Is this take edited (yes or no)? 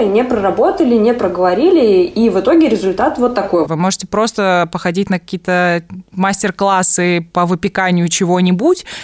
yes